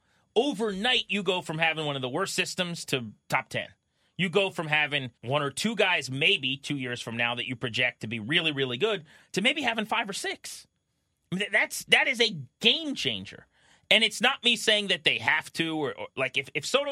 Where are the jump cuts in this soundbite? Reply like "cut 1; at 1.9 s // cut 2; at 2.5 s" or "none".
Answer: cut 1; at 5.2 s